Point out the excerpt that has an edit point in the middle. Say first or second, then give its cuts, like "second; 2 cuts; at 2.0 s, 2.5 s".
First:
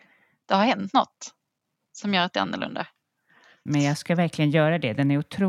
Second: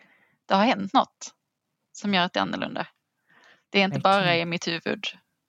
first; 1 cut; at 3.7 s